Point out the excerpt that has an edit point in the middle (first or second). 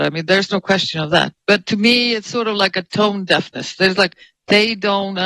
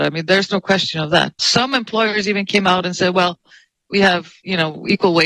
second